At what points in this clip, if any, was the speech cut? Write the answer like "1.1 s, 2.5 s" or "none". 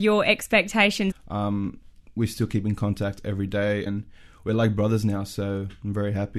1.1 s, 3.9 s